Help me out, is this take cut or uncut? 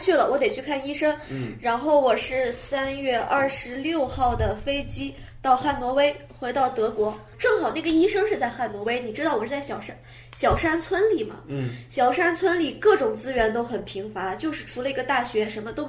uncut